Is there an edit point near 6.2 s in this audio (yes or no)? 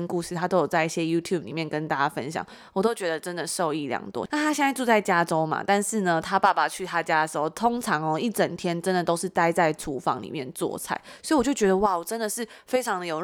no